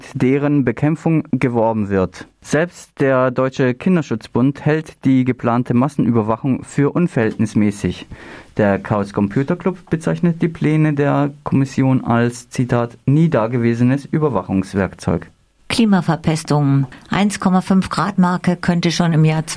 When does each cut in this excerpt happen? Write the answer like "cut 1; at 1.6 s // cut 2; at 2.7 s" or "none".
none

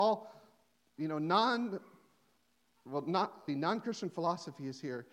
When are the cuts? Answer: cut 1; at 3.5 s

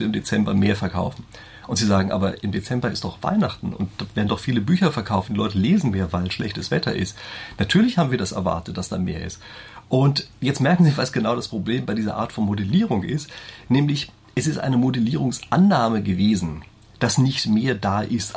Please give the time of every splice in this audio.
none

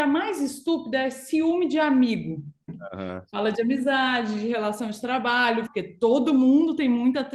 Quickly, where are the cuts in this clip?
cut 1; at 2.7 s // cut 2; at 5.7 s

